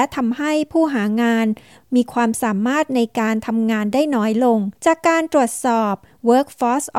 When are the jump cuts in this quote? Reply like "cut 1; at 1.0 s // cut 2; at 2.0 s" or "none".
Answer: cut 1; at 4.8 s